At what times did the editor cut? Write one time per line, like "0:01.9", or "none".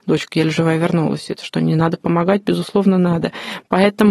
none